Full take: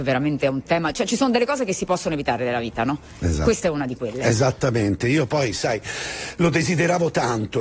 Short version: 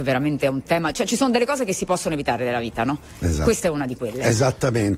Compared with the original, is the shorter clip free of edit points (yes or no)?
yes